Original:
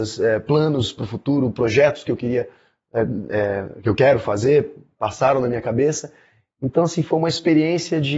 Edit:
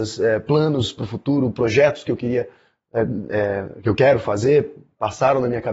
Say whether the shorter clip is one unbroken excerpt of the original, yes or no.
yes